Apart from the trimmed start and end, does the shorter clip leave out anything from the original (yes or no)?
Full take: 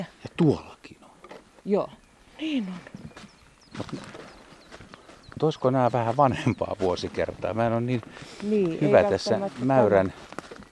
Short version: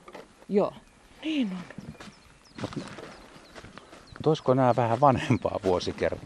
no